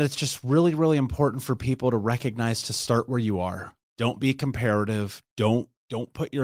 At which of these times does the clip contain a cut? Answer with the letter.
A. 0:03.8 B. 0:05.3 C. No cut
C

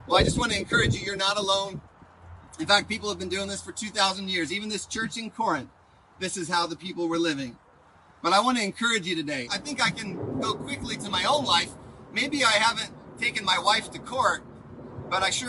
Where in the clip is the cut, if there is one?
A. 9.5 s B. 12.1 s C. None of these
A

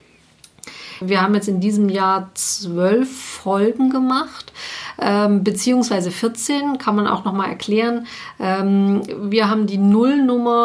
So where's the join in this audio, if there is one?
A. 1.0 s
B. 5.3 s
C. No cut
A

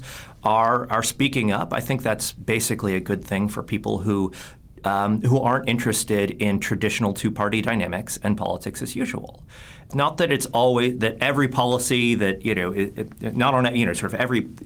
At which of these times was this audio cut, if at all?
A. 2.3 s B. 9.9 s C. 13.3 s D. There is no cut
B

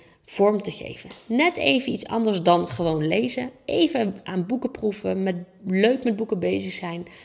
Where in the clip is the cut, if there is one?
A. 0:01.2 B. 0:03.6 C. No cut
C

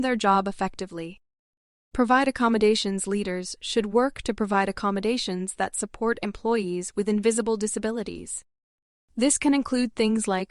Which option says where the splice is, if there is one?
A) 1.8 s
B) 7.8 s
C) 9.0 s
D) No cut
A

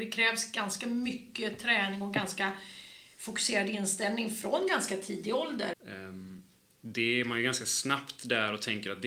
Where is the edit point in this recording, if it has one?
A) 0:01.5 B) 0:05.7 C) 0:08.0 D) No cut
B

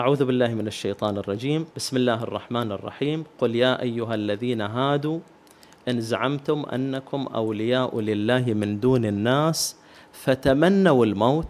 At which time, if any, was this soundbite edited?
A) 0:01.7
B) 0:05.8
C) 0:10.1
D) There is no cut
A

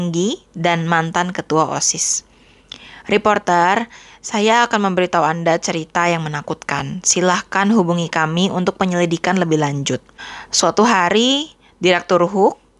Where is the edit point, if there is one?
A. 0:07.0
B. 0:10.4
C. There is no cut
C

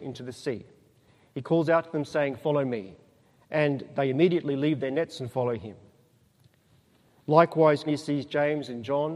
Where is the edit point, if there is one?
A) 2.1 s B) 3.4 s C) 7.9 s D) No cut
C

